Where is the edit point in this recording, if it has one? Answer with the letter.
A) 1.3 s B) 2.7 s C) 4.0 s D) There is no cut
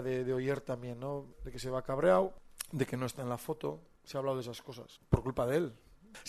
A